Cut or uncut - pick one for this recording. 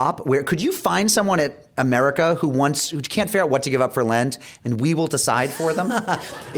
uncut